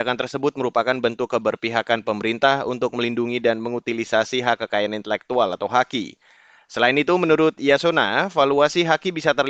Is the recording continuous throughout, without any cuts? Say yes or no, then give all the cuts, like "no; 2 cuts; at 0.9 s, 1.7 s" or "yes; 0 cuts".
yes; 0 cuts